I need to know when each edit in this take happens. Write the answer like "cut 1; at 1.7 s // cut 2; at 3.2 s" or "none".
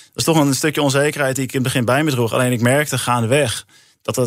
none